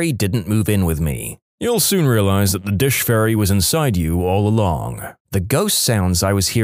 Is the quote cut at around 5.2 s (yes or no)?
yes